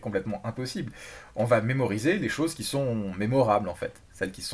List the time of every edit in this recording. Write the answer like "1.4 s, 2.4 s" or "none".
none